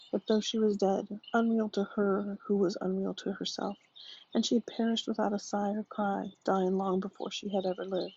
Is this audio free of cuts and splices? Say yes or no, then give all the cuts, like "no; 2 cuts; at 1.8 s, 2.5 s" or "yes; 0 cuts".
no; 1 cut; at 1.2 s